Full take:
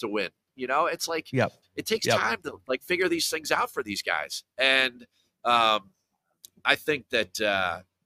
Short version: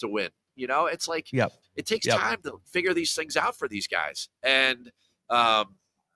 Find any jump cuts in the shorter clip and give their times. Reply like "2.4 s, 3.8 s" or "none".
2.6 s